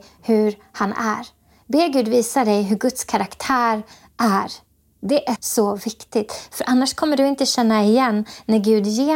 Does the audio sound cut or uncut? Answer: cut